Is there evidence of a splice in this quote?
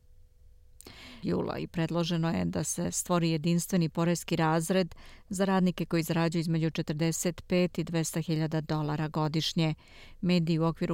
yes; 1 cut; at 1.2 s

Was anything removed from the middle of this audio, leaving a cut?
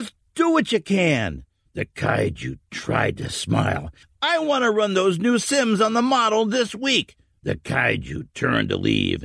no; 0 cuts

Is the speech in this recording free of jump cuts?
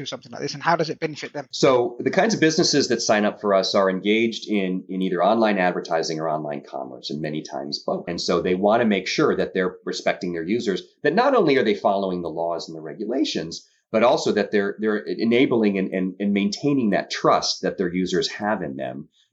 yes; 0 cuts

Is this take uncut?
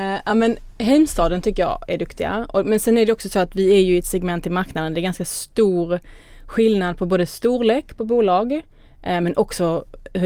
yes; 0 cuts

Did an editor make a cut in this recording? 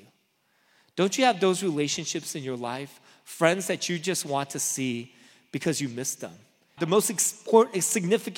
yes; 1 cut; at 6.8 s

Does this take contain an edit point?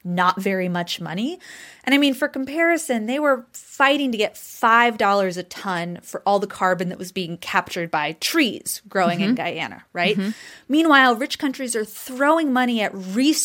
no; 0 cuts

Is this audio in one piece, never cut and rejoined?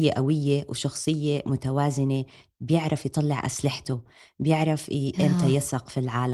yes; 0 cuts

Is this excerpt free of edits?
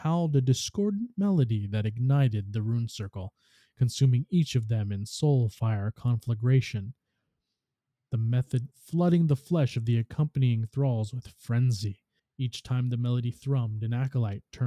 no; 2 cuts; at 8.7 s, 12.2 s

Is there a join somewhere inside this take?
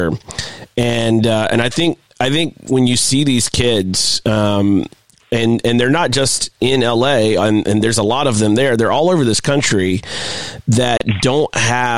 no; 0 cuts

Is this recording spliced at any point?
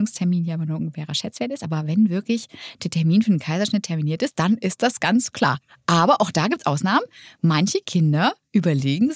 no; 0 cuts

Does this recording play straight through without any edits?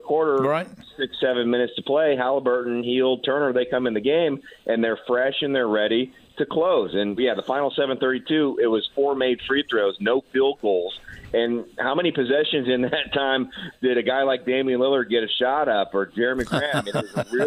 no; 1 cut; at 7.2 s

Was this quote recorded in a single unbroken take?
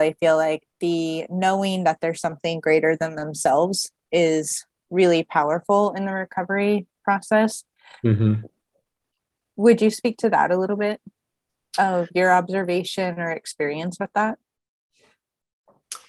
yes; 0 cuts

